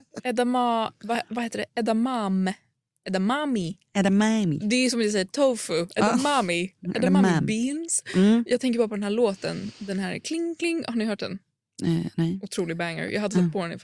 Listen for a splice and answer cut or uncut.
uncut